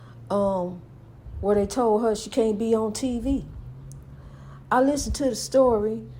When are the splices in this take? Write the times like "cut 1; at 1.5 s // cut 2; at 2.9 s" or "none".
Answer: none